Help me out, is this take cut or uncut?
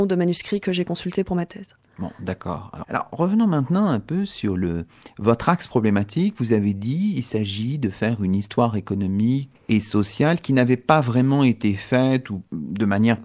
cut